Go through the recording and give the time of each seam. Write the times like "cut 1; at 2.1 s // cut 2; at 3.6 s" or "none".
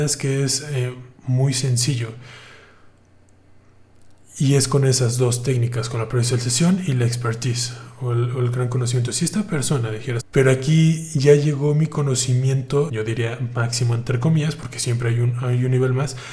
cut 1; at 1.2 s // cut 2; at 10.2 s // cut 3; at 12.9 s